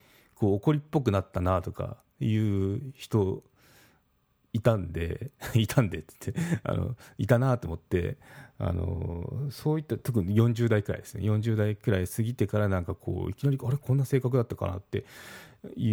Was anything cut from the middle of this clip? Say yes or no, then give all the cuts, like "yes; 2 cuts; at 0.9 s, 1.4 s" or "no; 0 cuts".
no; 0 cuts